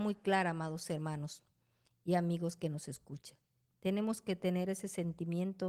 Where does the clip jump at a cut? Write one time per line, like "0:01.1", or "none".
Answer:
none